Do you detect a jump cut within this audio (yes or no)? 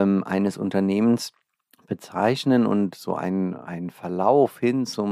no